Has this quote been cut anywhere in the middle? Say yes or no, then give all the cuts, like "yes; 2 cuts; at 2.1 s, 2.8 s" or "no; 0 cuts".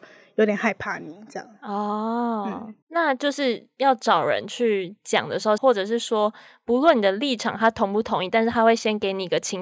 yes; 2 cuts; at 2.8 s, 5.6 s